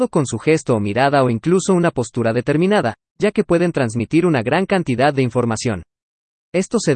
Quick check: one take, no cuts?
yes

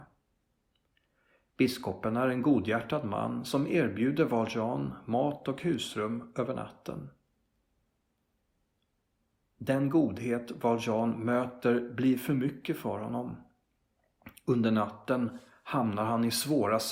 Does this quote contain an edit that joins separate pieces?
no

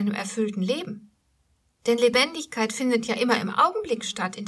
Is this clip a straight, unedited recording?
yes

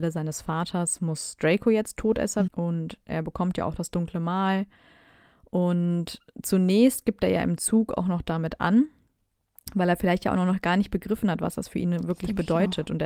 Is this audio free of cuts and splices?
no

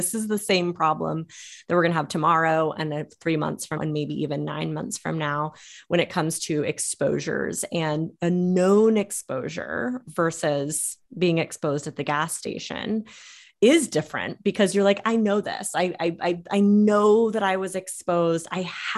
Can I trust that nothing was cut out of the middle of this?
no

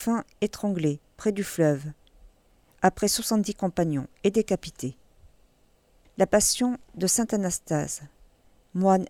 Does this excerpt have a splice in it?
yes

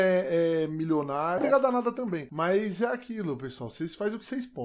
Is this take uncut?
no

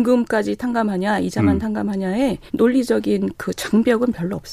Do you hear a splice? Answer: yes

